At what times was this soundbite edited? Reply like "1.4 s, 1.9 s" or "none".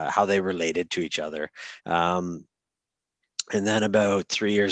1.8 s

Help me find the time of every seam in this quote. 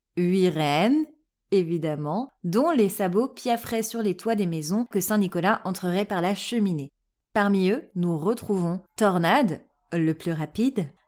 4.9 s, 7.1 s, 8.9 s

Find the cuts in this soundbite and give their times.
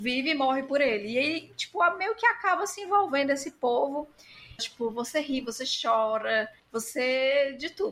4.6 s, 6.6 s

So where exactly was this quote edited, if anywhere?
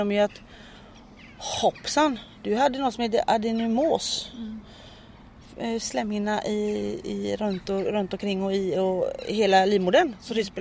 none

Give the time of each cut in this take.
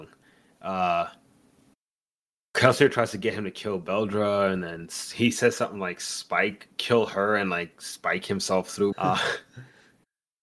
8.9 s

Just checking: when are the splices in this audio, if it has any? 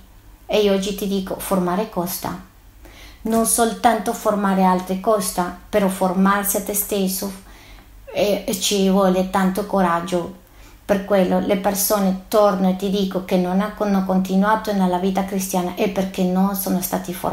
none

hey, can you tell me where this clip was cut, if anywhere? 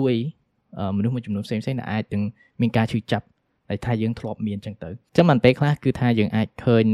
none

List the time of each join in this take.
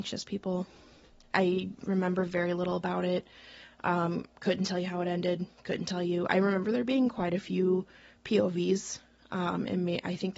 none

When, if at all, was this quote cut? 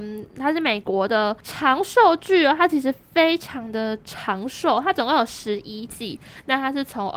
none

